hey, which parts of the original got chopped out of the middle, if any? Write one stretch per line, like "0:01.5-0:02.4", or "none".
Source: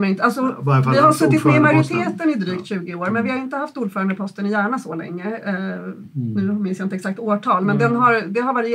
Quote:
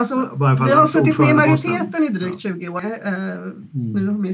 0:03.1-0:05.2